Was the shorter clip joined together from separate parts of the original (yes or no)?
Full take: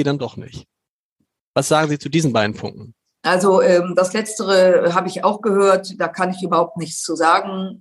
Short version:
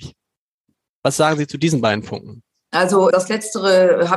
yes